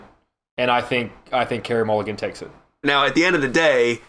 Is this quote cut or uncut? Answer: cut